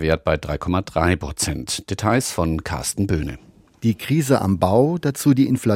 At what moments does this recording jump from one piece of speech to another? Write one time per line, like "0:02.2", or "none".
none